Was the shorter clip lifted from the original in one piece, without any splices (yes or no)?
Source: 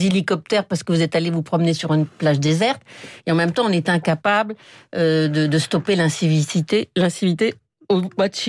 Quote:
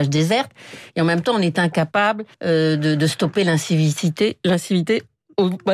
no